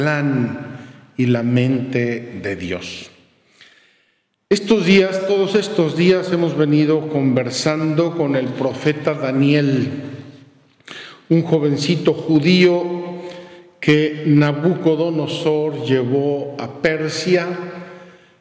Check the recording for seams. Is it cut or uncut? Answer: uncut